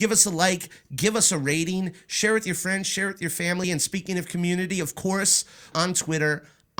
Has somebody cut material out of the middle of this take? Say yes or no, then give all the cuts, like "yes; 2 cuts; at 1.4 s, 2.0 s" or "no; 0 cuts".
yes; 2 cuts; at 3.6 s, 5.7 s